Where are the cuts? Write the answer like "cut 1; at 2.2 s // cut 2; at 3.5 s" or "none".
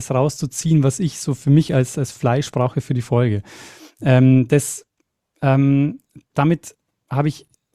none